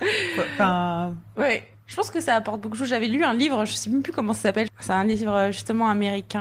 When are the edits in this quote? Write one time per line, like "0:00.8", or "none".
0:04.7